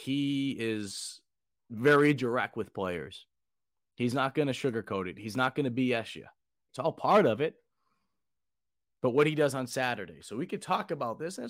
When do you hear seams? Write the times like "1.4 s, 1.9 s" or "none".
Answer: 6.7 s